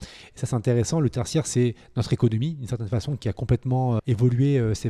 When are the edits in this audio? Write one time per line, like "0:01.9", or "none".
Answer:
0:04.0